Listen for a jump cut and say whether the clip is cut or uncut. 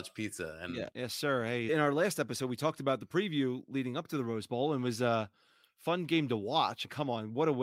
cut